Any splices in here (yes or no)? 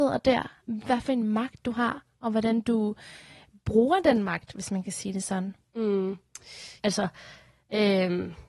yes